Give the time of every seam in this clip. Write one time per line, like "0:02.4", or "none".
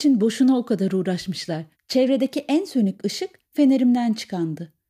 0:01.7